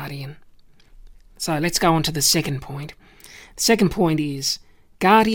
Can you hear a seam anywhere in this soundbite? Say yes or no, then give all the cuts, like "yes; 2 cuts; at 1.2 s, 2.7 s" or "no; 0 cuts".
no; 0 cuts